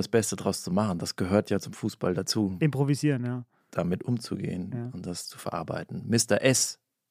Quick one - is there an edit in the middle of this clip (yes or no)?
no